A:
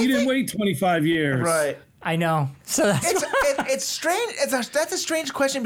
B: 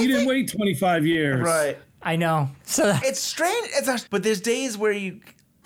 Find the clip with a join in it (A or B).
B